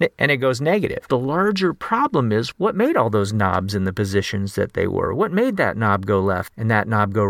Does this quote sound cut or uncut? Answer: uncut